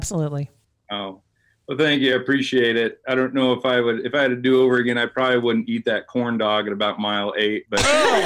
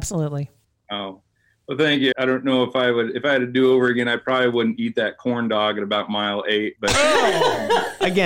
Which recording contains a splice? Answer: second; 1 cut; at 2.1 s

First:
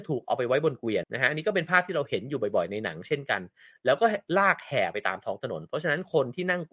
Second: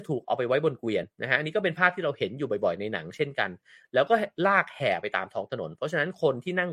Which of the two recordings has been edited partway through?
first; 1 cut; at 1.0 s

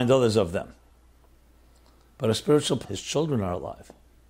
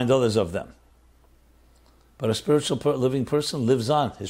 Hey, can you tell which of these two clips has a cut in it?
first; 1 cut; at 2.8 s

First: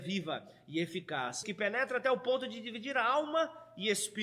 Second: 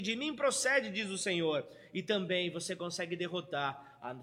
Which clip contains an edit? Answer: first; 1 cut; at 1.4 s

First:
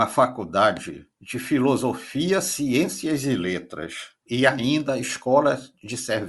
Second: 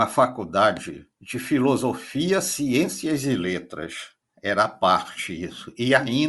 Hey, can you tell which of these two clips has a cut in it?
first; 1 cut; at 4.3 s

